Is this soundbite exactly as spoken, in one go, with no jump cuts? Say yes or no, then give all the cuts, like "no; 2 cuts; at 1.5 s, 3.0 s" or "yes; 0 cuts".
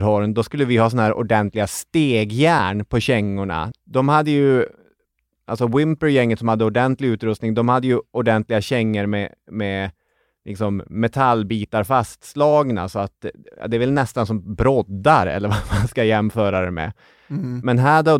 no; 1 cut; at 3.7 s